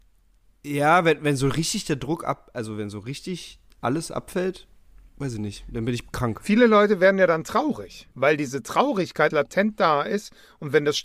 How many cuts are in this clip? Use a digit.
2